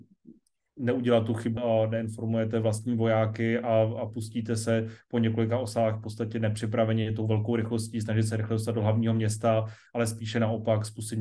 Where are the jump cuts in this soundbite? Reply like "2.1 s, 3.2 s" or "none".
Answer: 1.6 s